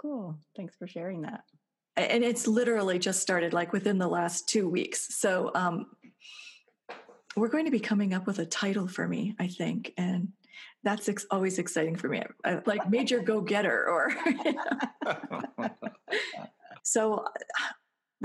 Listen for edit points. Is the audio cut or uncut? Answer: cut